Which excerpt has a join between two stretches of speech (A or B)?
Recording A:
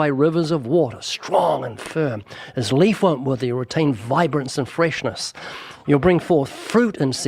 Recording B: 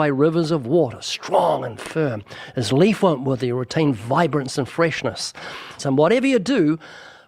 B